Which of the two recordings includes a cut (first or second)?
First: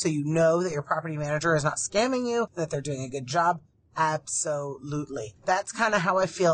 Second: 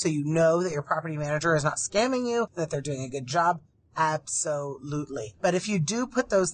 first